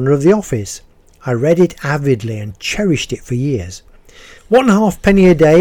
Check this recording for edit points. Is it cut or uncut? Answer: cut